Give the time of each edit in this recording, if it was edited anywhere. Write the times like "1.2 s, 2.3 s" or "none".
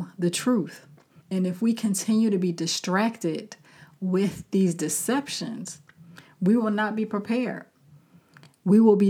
1.2 s

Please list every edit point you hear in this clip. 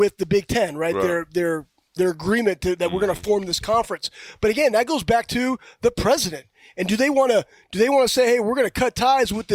2.0 s

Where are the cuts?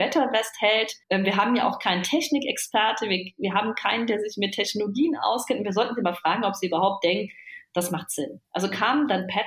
1.0 s

